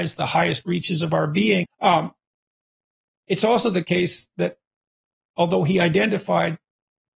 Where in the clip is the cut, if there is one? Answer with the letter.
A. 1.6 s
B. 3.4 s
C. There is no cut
A